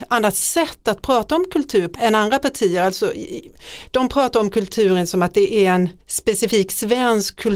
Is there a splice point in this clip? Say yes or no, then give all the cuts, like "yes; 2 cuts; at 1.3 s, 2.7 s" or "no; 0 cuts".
yes; 2 cuts; at 1.9 s, 6.0 s